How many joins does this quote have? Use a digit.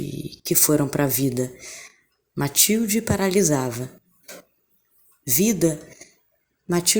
0